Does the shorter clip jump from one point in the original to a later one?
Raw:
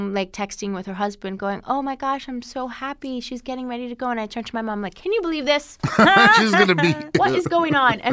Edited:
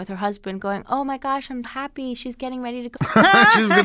yes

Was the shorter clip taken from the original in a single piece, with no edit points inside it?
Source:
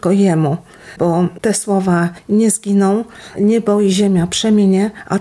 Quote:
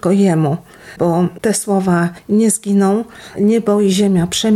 yes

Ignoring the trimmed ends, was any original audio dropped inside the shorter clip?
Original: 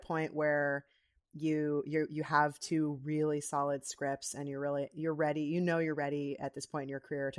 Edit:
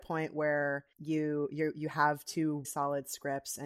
yes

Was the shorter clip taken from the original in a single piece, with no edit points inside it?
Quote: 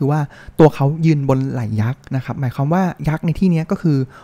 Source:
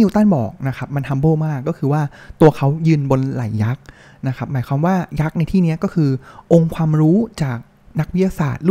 no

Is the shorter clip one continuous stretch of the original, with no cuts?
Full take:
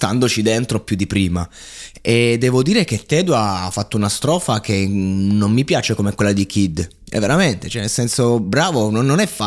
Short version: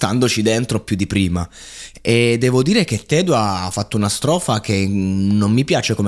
yes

